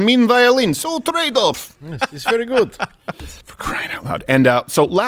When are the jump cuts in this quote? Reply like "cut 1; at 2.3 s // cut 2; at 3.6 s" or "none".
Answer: cut 1; at 3.4 s